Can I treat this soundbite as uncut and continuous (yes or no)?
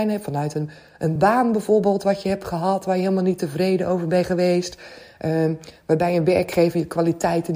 yes